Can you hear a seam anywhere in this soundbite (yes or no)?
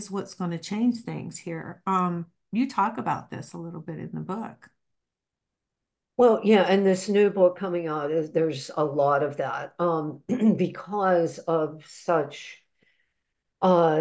no